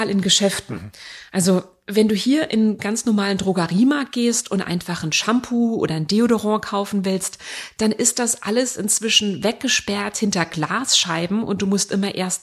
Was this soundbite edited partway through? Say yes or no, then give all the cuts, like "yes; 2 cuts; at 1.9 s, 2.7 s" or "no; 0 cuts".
no; 0 cuts